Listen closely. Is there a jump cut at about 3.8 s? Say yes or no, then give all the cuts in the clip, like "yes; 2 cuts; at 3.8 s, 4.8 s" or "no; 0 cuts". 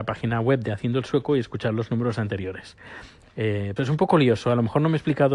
yes; 1 cut; at 3.8 s